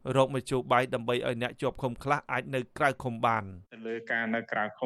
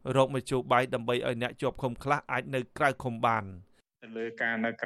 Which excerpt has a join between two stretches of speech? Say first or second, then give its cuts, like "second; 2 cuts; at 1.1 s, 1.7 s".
first; 1 cut; at 3.6 s